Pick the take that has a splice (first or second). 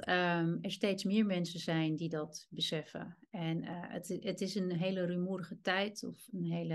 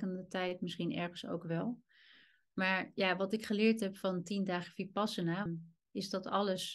second